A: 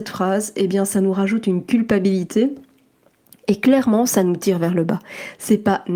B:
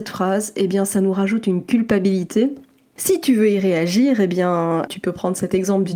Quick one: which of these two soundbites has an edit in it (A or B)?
B